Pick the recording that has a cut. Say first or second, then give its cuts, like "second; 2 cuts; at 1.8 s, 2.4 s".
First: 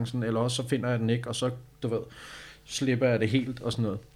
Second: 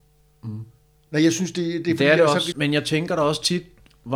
second; 1 cut; at 2.5 s